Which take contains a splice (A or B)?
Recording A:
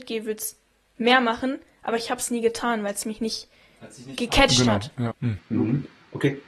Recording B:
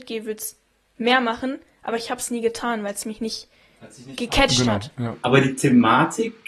A